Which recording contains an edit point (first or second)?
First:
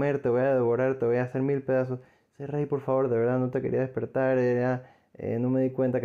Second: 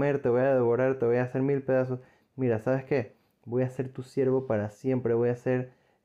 second